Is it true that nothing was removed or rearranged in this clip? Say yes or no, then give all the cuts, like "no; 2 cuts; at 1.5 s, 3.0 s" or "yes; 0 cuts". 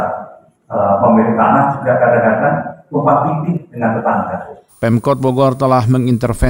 no; 1 cut; at 4.7 s